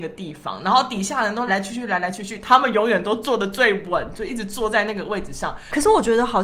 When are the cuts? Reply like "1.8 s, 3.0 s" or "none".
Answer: 1.5 s